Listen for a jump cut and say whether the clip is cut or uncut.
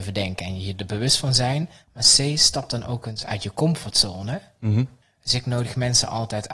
cut